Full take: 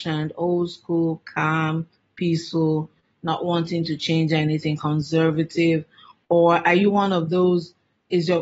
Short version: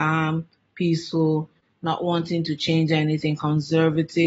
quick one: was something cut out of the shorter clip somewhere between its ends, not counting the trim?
no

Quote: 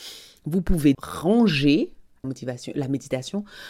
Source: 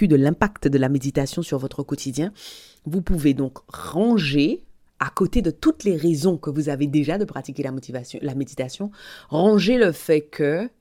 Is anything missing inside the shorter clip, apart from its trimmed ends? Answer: yes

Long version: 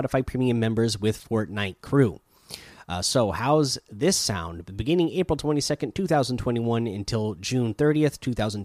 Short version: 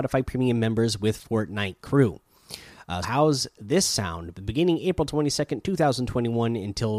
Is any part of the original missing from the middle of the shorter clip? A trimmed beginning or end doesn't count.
yes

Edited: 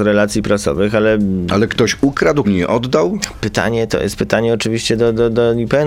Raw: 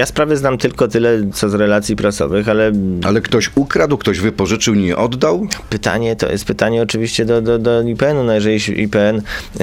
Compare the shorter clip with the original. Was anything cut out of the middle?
yes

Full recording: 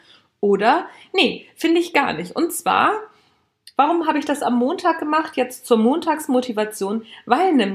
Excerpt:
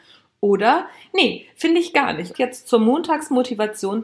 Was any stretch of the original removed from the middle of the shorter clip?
yes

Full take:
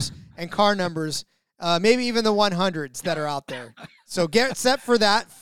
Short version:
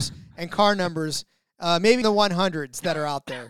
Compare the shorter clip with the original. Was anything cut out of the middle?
yes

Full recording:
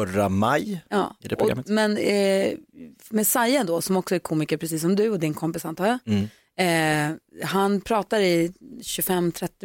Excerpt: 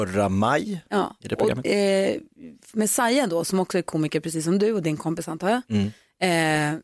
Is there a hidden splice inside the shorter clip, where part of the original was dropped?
yes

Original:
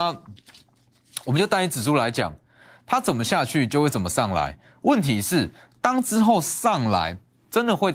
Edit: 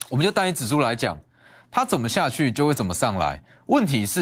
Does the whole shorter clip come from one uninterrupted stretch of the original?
yes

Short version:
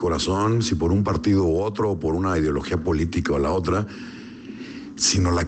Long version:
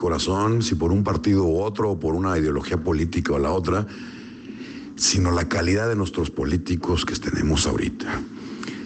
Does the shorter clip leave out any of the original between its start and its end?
no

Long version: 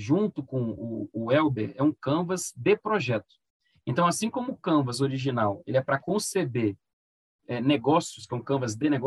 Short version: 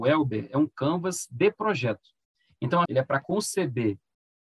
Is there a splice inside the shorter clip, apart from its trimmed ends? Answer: yes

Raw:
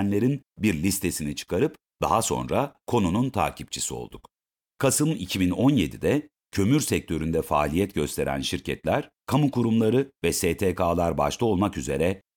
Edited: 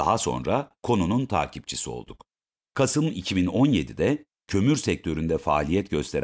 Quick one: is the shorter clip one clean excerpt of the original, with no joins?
yes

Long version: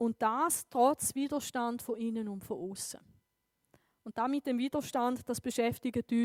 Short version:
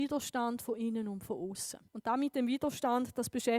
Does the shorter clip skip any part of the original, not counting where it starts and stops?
yes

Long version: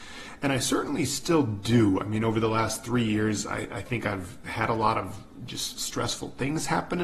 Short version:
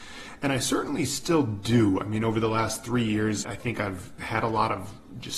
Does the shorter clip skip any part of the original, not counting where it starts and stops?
yes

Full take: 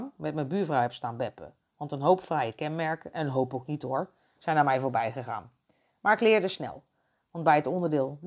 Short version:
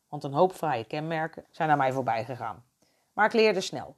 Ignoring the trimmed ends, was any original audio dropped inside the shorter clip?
yes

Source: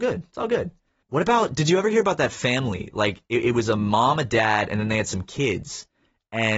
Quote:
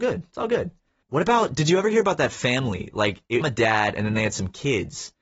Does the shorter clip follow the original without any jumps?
no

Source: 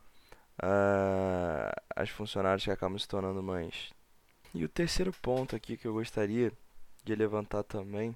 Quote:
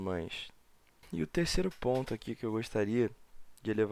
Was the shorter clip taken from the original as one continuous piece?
yes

